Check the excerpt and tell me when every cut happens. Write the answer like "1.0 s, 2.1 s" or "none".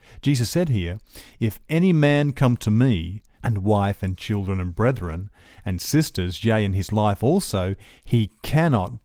3.4 s